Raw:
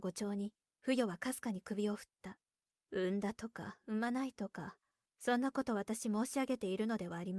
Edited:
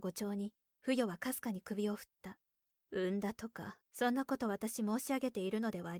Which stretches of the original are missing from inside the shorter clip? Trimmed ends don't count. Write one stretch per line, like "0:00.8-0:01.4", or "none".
0:03.8-0:05.1